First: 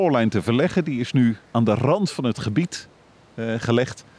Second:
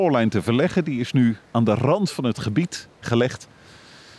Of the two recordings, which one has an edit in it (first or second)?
second